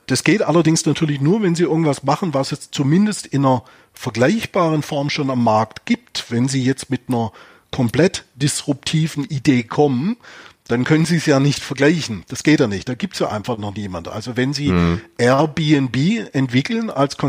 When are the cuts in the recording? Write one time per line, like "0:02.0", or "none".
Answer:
none